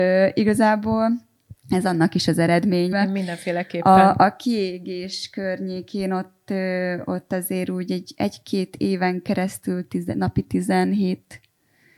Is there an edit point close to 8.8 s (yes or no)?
no